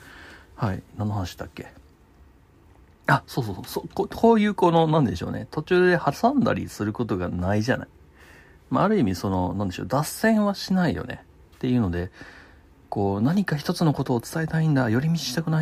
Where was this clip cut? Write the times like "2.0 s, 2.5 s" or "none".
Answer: none

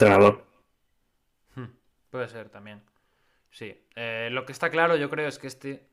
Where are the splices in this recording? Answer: none

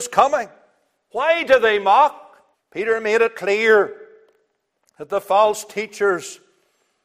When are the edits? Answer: 1.1 s, 2.5 s

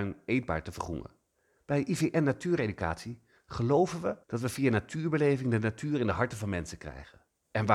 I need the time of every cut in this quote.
1.6 s, 4.2 s

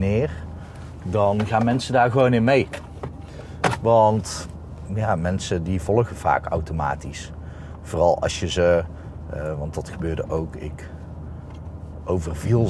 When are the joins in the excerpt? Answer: none

